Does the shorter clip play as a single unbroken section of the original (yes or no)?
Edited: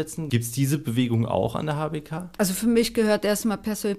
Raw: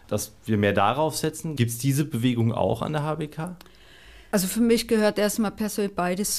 no